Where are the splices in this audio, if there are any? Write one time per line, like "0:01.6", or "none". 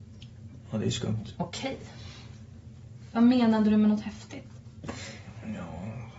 0:01.3
0:03.1